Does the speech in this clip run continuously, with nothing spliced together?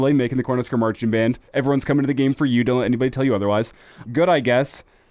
no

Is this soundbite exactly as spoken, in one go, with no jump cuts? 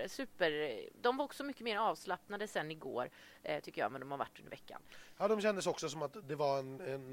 yes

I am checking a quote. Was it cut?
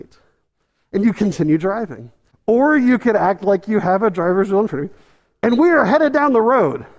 yes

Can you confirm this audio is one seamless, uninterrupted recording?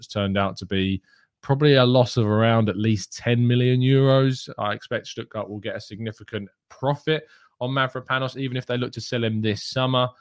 yes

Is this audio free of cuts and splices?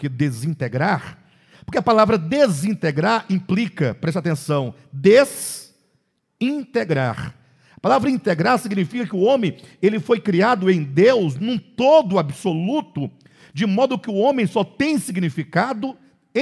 yes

